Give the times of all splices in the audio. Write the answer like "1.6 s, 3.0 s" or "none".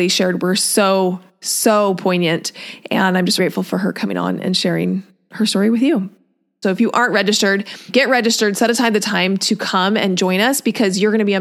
3.4 s, 6.6 s, 7.9 s